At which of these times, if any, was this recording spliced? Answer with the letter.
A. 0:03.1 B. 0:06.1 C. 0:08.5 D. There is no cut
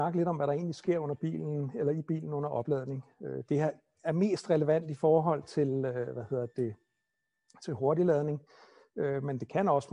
D